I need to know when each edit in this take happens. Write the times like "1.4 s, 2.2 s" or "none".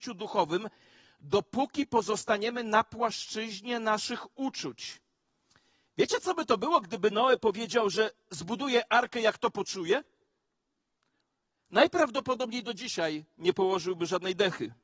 none